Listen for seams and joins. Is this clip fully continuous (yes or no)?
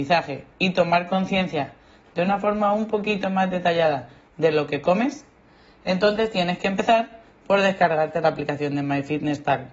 yes